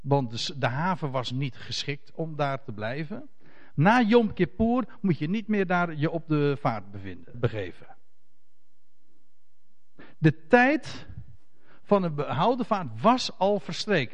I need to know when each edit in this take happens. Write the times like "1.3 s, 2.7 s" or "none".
3.8 s, 7.3 s